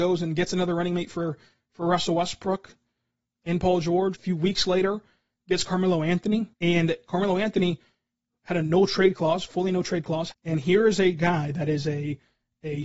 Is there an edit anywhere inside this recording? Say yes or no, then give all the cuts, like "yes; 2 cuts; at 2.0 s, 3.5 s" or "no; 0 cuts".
yes; 3 cuts; at 4.1 s, 6.5 s, 10.3 s